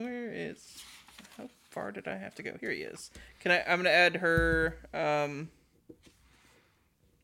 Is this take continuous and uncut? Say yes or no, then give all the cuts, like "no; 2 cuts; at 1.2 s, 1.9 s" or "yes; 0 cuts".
yes; 0 cuts